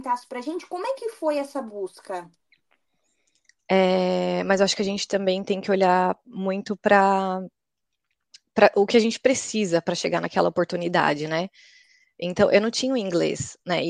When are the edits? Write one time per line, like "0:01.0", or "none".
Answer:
0:03.6